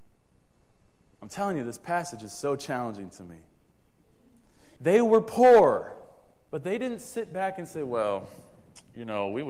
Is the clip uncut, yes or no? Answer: no